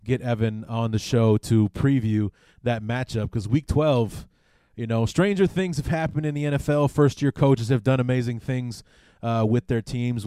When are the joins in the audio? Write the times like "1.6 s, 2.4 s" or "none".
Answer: none